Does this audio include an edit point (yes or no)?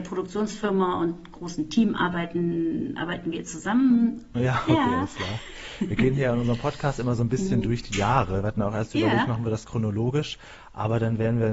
yes